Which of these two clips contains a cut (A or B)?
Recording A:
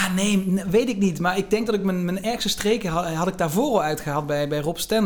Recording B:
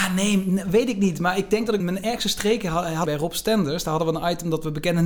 B